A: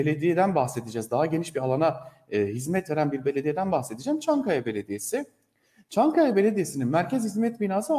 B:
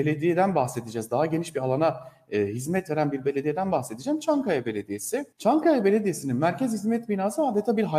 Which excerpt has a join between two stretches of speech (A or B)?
B